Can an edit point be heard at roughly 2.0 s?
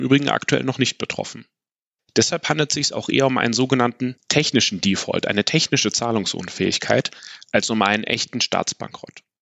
yes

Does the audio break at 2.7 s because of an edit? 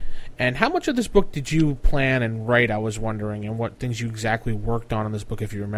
no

